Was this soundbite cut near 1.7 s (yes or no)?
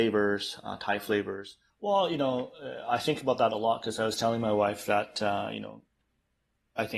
yes